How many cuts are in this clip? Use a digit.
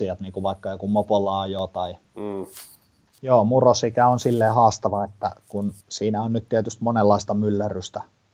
2